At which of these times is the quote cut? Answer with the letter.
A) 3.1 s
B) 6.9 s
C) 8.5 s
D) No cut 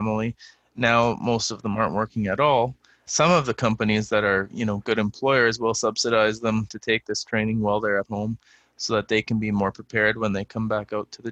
A